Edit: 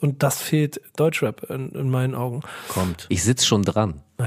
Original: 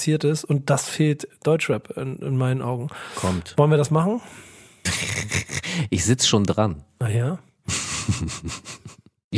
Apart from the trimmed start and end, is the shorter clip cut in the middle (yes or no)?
yes